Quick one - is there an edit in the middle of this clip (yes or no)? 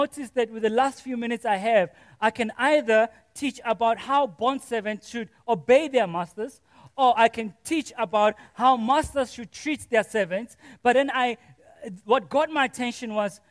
no